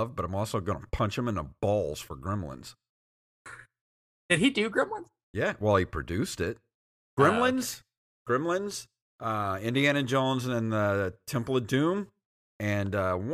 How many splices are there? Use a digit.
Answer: 0